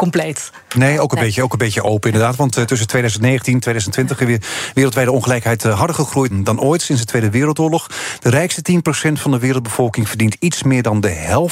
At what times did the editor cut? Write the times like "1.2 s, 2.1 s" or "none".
6.3 s